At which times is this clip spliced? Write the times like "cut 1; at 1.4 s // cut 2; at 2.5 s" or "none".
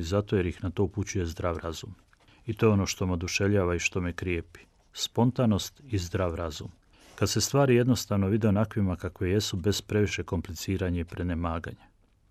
none